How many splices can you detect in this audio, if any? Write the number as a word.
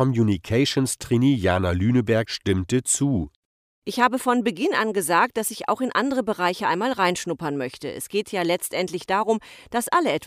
zero